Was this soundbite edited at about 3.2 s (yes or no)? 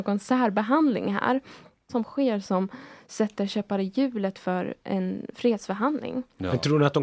no